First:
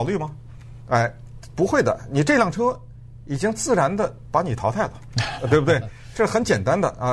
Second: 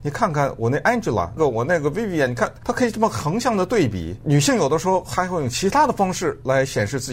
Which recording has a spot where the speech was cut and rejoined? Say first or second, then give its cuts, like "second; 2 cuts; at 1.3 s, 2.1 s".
second; 1 cut; at 1.4 s